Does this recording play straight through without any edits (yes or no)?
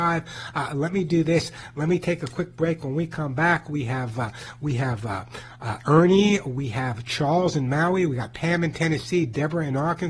yes